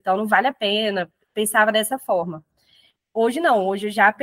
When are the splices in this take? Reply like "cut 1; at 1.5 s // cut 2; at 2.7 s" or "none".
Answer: none

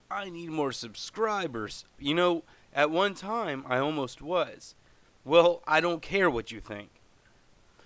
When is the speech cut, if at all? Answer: cut 1; at 1.9 s // cut 2; at 5.2 s

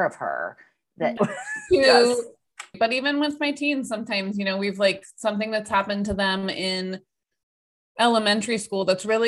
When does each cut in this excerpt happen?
cut 1; at 1.2 s // cut 2; at 2.7 s

